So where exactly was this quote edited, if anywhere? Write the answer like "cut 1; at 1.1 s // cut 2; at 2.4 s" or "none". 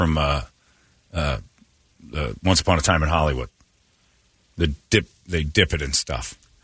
none